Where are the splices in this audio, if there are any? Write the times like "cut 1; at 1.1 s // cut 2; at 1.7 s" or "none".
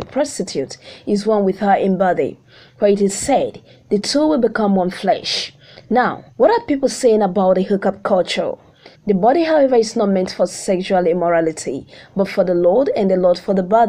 cut 1; at 6.3 s // cut 2; at 8.9 s